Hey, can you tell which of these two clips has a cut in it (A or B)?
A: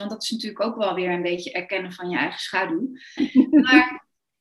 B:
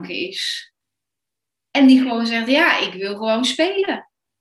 A